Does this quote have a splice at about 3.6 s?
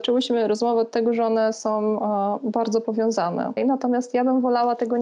yes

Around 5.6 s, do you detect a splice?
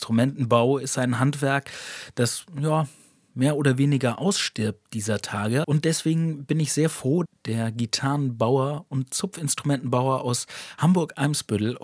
yes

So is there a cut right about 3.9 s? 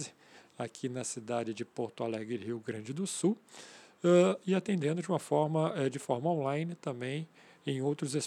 no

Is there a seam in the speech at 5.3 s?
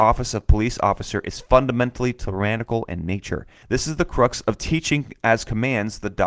no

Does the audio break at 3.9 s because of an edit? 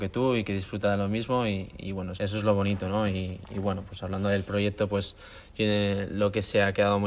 no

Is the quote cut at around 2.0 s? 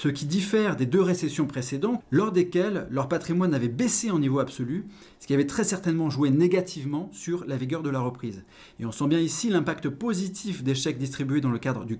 yes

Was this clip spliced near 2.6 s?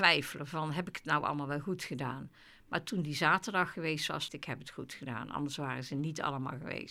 no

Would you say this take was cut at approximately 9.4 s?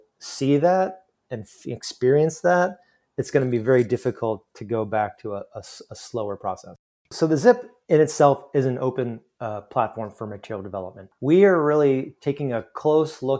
no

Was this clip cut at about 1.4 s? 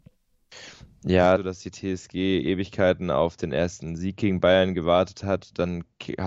yes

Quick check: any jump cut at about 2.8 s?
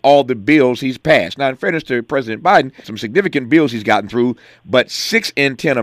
yes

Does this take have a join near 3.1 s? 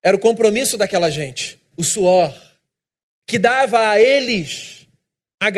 no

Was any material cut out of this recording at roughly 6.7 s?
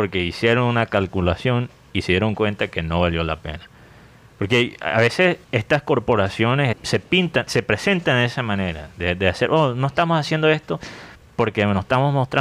yes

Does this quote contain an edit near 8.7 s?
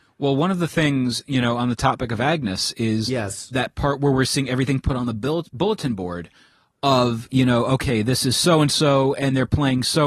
no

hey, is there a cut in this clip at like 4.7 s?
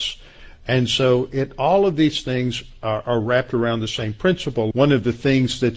yes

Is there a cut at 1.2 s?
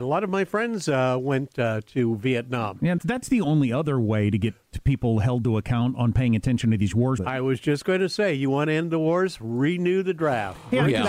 no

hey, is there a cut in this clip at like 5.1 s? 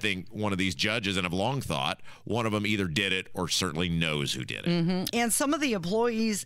yes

